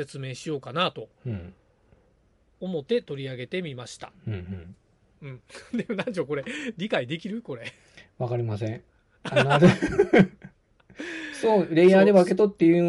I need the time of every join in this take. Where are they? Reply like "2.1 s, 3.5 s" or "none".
none